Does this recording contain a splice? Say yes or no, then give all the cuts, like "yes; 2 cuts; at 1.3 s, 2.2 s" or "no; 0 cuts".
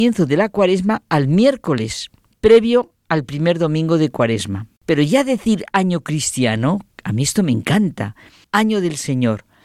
yes; 2 cuts; at 4.8 s, 8.4 s